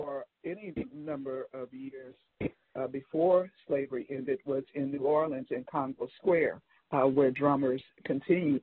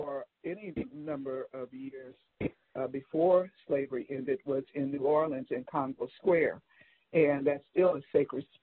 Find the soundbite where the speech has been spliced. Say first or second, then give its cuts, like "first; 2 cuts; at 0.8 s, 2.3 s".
first; 1 cut; at 6.8 s